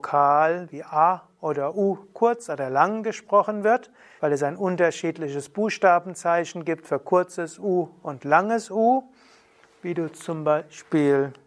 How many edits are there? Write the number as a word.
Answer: one